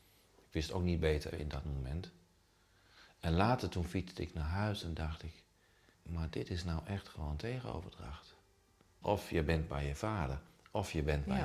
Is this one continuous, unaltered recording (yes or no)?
no